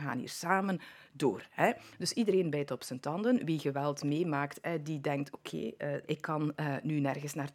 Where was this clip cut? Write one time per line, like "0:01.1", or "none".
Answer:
0:06.0

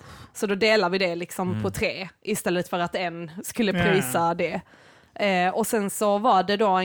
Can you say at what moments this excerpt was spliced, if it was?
none

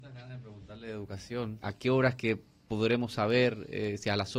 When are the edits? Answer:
0:01.6

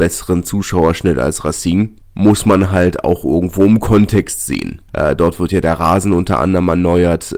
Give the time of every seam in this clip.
0:04.9

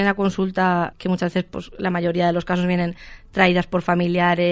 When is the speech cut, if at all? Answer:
0:00.9

